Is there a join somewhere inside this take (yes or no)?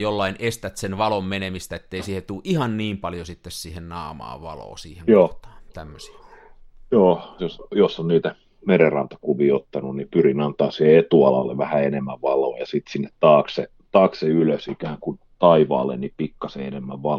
yes